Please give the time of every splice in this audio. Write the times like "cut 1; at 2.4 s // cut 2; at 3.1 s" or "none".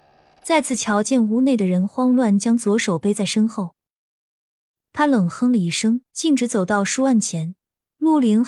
cut 1; at 6.1 s